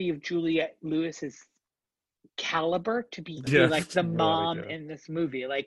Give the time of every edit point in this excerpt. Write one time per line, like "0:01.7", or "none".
0:03.5